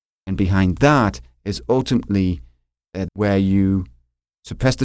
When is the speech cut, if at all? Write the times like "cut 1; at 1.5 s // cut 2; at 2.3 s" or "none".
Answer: cut 1; at 3.1 s